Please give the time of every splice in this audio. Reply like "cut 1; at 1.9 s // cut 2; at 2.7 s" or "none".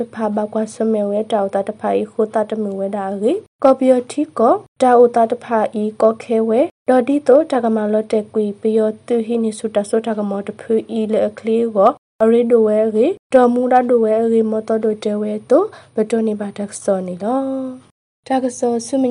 none